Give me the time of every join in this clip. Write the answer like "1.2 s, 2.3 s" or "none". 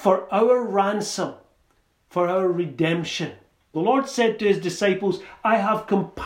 3.7 s